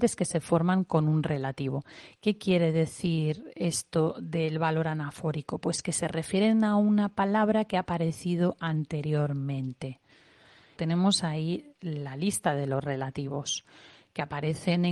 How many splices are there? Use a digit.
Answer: 2